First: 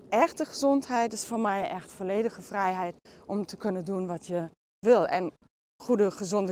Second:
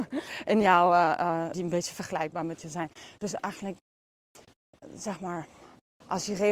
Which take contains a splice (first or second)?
second